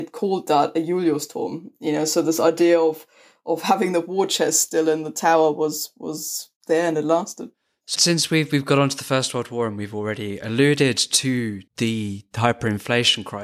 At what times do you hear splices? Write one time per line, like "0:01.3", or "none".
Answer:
0:07.9
0:11.7